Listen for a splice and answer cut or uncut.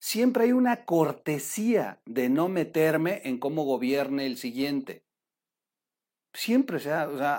uncut